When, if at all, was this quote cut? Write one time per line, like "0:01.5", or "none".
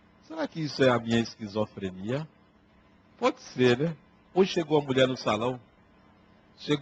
0:04.2